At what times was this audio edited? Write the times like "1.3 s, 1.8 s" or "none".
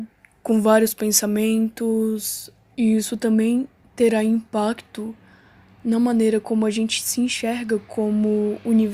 2.7 s